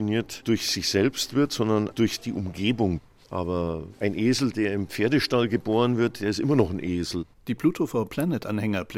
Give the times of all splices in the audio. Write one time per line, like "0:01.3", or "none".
none